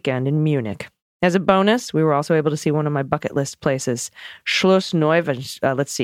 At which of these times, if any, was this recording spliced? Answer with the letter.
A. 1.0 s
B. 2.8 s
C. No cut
C